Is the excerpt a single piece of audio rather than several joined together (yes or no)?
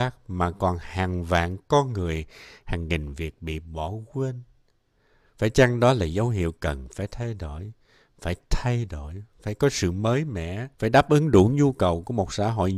no